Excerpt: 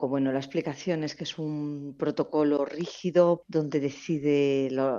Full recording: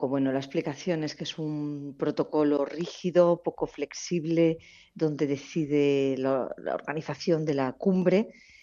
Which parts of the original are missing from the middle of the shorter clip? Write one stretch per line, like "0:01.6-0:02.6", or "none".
0:03.4-0:04.9